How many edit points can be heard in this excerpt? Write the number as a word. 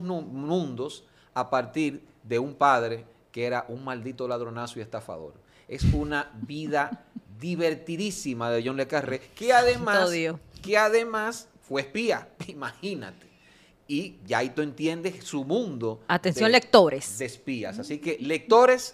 zero